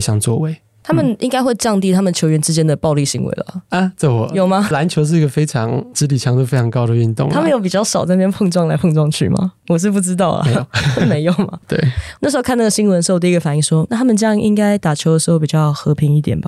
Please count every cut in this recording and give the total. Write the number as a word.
two